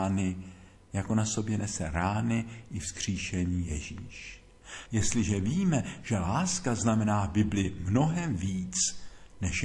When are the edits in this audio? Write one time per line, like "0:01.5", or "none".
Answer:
0:04.9

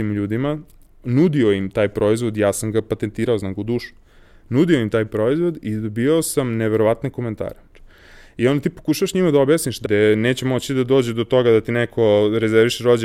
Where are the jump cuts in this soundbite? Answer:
0:07.7
0:09.9

